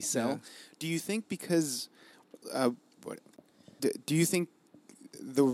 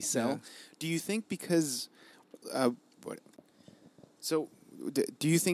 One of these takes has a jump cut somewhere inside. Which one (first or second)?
first